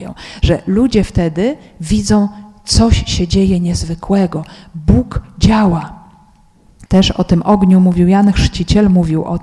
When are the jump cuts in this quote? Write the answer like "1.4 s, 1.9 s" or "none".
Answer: 6.9 s